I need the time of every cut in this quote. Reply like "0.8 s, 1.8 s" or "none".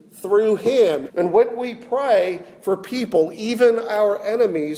1.1 s